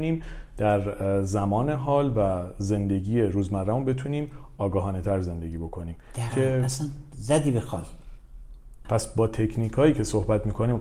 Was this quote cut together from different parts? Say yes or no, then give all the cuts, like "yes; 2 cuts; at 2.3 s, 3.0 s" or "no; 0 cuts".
yes; 2 cuts; at 6.3 s, 8.8 s